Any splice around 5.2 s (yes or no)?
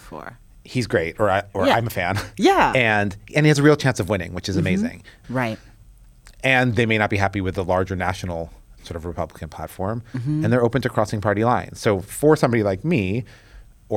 yes